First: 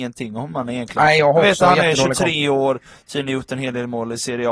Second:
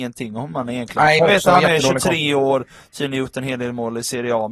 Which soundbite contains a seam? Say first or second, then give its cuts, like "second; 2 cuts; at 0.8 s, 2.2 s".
second; 1 cut; at 1.2 s